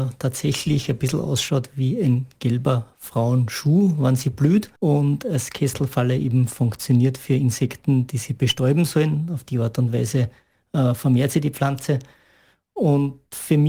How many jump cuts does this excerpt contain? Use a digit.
1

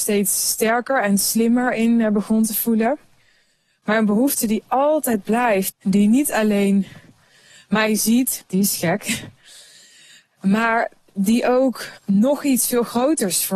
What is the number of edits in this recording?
3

